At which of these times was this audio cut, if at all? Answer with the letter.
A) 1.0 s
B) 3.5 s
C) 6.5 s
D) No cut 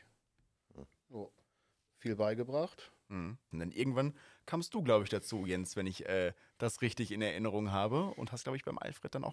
B